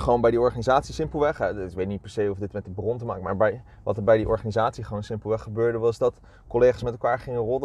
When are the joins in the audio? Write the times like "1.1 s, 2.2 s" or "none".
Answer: none